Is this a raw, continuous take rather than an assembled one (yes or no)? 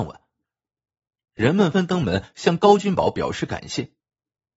no